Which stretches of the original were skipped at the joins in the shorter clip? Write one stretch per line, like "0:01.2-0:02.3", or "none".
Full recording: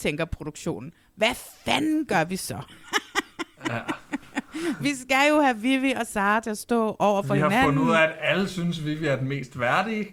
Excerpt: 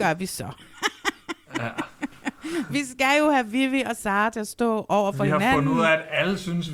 none